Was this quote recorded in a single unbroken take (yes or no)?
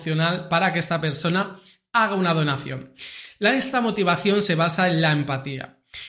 yes